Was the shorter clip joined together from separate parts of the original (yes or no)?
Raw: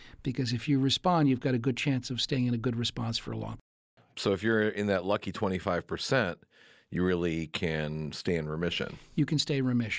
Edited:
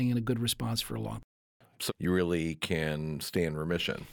yes